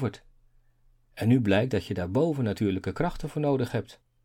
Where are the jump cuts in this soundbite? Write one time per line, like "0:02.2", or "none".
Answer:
none